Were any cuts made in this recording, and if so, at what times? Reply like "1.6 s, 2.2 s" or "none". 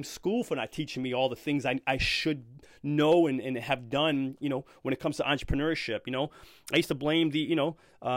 none